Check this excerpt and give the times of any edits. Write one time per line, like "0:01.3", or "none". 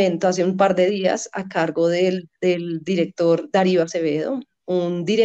none